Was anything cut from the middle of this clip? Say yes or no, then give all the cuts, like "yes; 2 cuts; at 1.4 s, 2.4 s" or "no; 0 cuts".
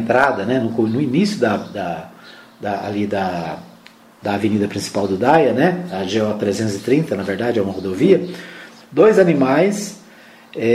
yes; 1 cut; at 8.8 s